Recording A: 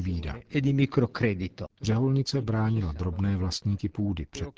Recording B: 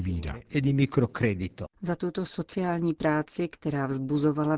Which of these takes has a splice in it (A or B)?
A